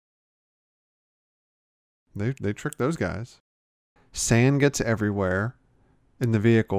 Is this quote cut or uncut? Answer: cut